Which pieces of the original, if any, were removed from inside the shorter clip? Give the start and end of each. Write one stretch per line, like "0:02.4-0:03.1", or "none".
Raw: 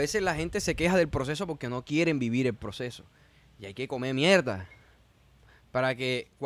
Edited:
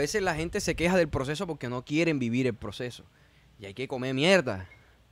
none

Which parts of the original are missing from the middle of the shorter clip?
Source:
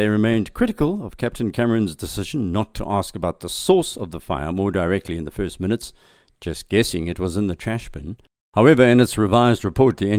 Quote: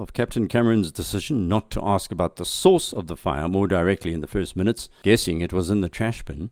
0:06.1-0:06.7

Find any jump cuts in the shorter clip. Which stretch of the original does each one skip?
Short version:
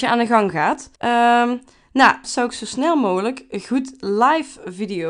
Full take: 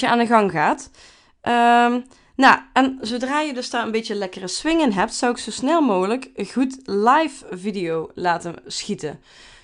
0:01.0-0:01.4
0:02.7-0:05.1

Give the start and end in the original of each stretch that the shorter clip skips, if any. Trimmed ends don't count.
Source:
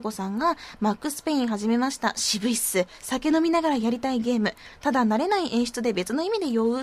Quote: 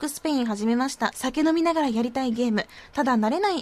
0:02.1-0:03.0

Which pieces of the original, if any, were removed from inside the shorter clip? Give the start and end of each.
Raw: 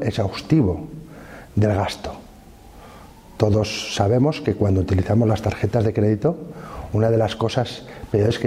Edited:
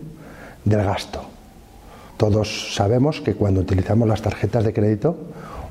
0:03.0-0:03.3

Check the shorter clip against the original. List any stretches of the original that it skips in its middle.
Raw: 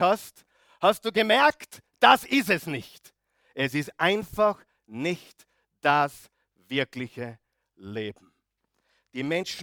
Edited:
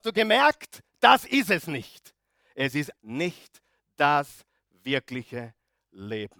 0:04.0-0:04.8

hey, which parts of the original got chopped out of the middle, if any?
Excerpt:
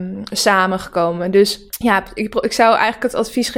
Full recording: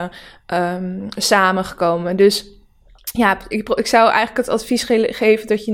0:02.5-0:03.0

